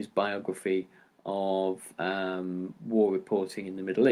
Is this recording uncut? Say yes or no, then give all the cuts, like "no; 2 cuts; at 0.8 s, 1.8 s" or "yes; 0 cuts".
yes; 0 cuts